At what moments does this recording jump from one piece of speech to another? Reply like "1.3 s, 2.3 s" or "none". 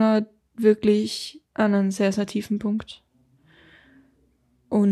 1.4 s